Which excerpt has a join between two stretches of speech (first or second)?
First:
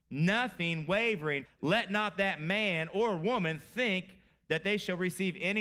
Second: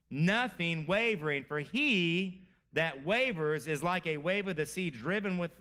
first